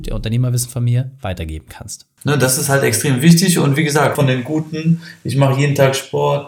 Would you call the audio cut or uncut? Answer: cut